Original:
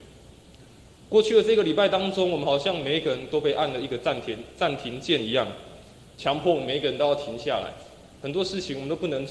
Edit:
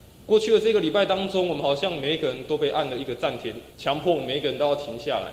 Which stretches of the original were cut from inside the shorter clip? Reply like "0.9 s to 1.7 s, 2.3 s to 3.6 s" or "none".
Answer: 4.5 s to 6.1 s